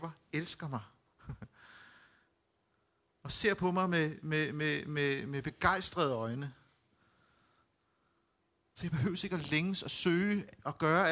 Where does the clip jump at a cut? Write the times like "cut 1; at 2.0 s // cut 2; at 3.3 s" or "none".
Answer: none